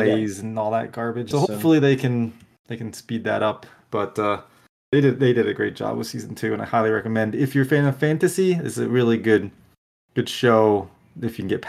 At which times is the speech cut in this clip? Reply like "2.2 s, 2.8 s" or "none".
1.3 s